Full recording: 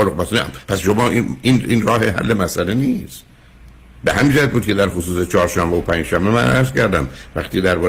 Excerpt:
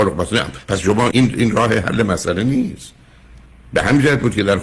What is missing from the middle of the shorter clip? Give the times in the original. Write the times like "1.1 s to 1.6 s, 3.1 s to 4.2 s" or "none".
1.1 s to 1.4 s

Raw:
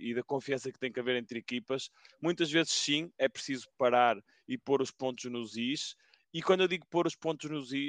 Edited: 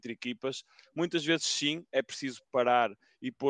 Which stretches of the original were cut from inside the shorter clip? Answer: none

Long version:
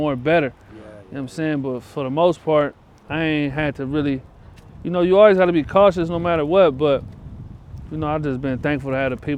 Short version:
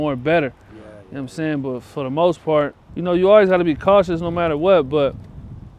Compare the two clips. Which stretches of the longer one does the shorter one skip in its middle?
2.9 s to 4.8 s

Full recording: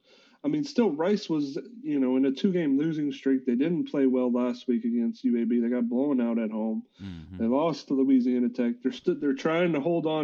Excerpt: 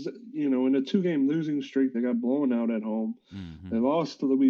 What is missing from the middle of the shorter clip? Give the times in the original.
3.4 s to 5.6 s

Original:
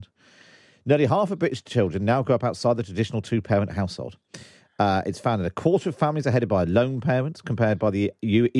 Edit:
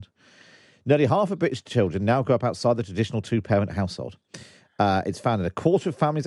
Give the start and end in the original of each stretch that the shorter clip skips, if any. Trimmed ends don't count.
none

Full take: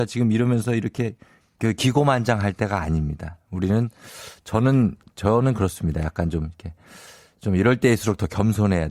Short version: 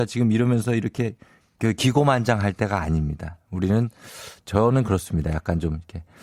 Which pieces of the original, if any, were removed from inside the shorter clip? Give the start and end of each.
4.4 s to 5.1 s

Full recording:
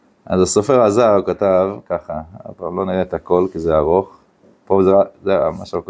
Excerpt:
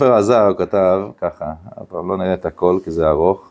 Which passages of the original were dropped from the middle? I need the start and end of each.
none

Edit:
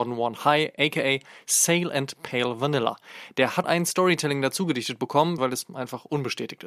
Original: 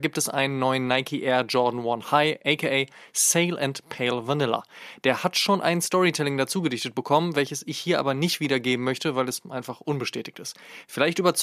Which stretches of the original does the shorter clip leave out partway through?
5.3 s to 5.6 s, 7.3 s to 9.1 s

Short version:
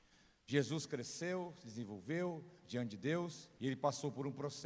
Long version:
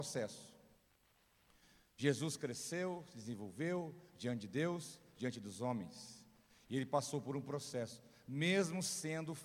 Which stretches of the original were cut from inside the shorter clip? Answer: 5.1 s to 6.7 s

